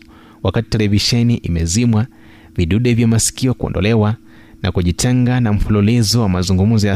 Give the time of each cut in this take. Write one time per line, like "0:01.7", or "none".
none